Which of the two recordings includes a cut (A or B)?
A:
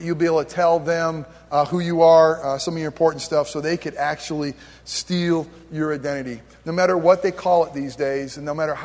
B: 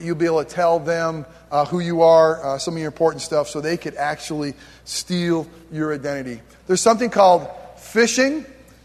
B